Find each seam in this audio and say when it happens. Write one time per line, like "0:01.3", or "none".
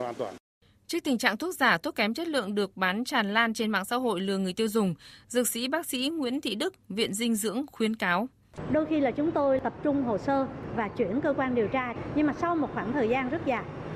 none